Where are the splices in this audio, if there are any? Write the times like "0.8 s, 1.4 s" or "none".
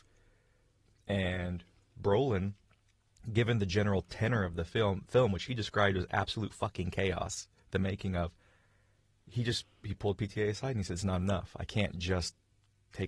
none